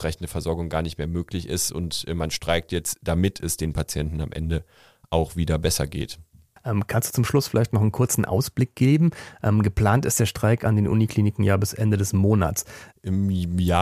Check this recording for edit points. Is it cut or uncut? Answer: cut